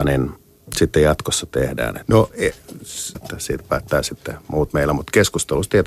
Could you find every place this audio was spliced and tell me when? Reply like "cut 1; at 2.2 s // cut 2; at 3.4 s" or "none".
cut 1; at 2.0 s // cut 2; at 3.1 s